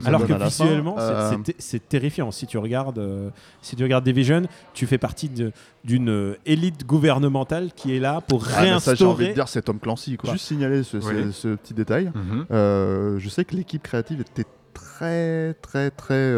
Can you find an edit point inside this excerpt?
yes; 1 cut; at 10.2 s

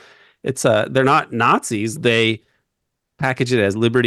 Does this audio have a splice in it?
yes; 1 cut; at 2.0 s

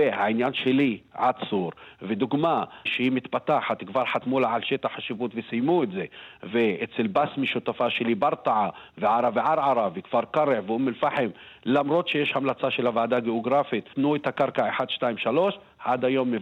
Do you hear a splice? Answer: yes; 2 cuts; at 2.9 s, 13.9 s

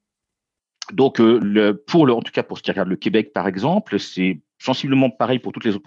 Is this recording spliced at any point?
no; 0 cuts

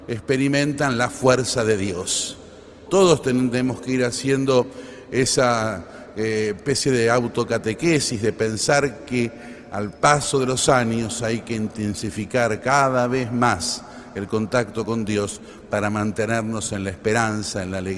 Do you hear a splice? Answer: yes; 1 cut; at 2.9 s

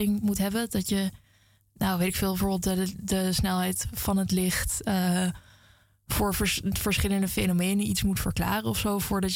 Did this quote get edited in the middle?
no; 0 cuts

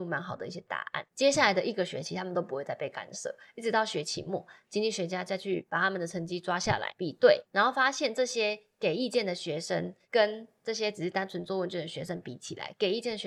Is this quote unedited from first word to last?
yes; 0 cuts

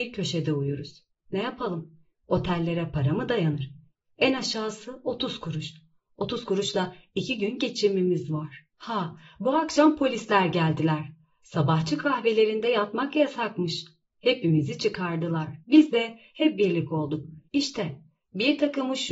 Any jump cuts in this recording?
yes; 3 cuts; at 8.7 s, 15.6 s, 17.5 s

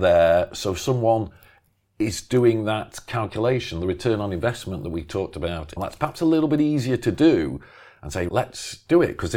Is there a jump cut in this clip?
yes; 2 cuts; at 5.8 s, 8.3 s

